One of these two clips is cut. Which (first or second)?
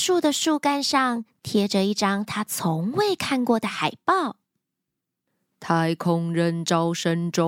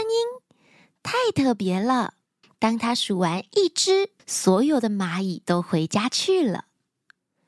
second